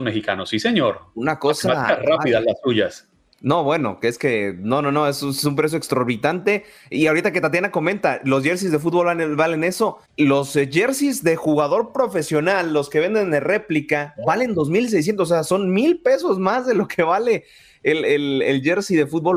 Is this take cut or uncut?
cut